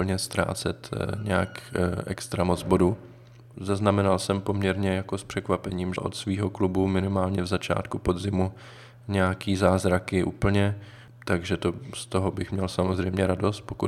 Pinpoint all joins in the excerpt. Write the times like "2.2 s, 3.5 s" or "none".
3.5 s, 6.0 s